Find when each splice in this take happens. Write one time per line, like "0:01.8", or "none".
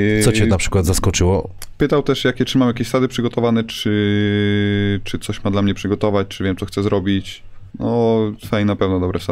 0:07.7